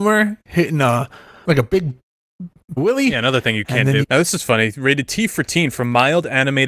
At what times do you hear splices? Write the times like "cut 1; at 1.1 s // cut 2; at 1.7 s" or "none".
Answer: cut 1; at 1.4 s // cut 2; at 2.8 s // cut 3; at 4.0 s